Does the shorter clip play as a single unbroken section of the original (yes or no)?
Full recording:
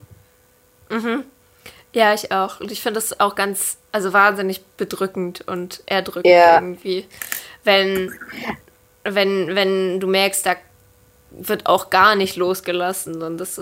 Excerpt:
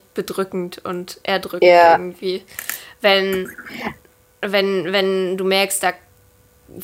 yes